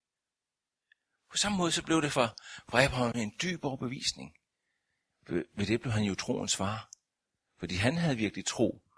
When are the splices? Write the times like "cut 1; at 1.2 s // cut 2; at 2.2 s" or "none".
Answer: none